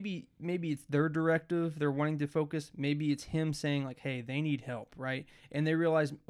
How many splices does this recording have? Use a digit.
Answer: 0